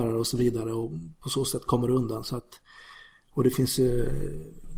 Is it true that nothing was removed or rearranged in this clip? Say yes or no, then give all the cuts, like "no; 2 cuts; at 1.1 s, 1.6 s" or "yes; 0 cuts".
yes; 0 cuts